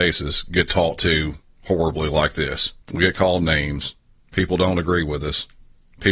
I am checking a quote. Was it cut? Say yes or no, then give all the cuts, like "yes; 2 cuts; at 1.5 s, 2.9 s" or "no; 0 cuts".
yes; 2 cuts; at 2.8 s, 4.2 s